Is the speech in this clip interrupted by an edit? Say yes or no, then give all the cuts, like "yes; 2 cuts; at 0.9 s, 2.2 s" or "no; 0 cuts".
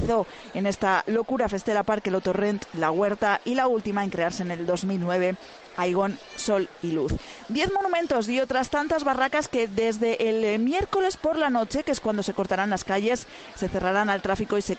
no; 0 cuts